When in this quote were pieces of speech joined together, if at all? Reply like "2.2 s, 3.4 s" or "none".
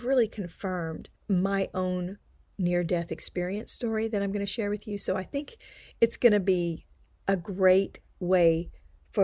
1.2 s